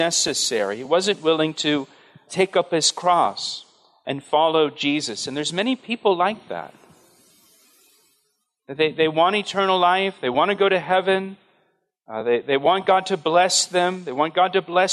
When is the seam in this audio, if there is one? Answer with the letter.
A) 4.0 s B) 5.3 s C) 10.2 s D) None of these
D